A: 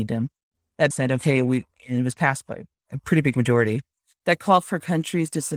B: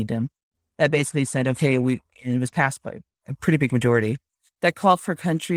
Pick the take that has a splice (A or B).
A